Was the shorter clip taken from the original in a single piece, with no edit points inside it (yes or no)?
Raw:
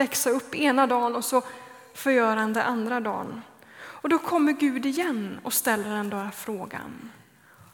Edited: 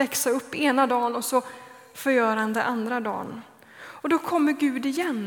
yes